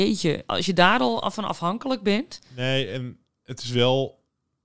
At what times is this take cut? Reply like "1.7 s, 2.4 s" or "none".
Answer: none